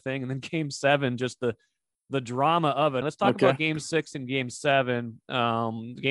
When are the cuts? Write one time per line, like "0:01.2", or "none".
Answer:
0:03.0